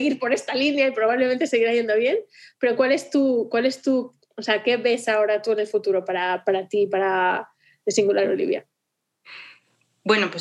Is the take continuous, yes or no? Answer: yes